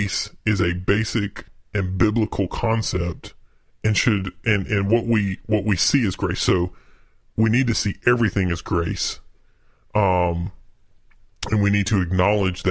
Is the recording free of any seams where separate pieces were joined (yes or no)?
yes